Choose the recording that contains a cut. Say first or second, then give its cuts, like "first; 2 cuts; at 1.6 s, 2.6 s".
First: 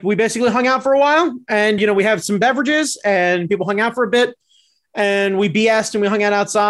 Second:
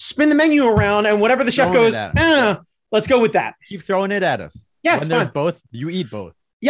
first; 1 cut; at 1.8 s